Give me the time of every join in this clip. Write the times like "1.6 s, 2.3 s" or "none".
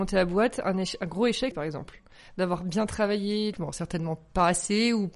1.5 s, 3.5 s